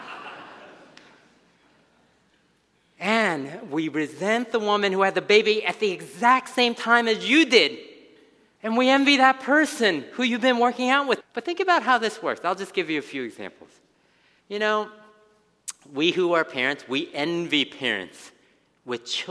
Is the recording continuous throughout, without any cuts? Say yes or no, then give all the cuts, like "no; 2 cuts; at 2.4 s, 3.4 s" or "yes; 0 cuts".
no; 2 cuts; at 8.6 s, 11.2 s